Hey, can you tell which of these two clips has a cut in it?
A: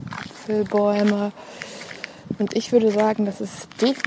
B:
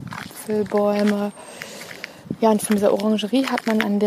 A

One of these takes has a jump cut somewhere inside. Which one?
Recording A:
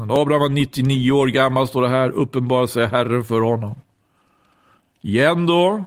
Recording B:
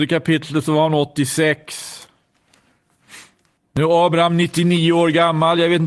B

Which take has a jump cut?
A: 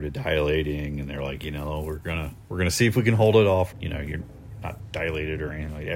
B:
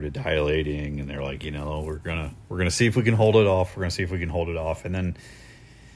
A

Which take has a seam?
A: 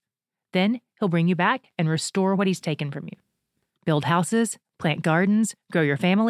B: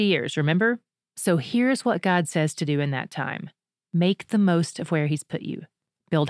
A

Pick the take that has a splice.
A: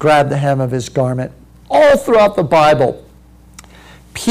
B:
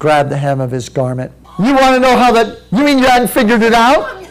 B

